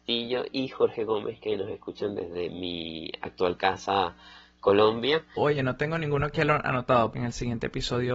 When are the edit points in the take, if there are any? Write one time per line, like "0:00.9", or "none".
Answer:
0:05.3
0:07.1